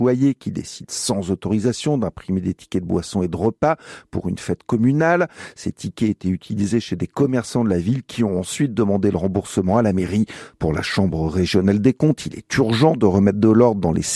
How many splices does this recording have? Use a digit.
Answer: 1